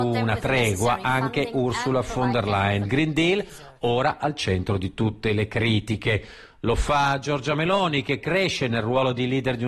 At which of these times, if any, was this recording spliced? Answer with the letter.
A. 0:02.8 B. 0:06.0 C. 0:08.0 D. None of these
A